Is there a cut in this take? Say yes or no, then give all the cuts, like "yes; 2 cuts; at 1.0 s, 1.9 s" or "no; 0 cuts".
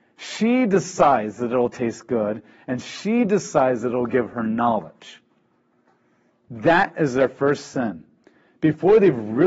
no; 0 cuts